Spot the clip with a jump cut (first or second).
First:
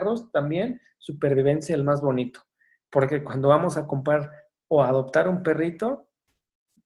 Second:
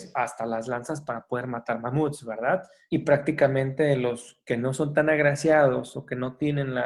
second